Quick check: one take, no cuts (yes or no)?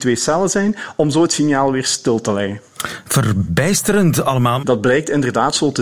no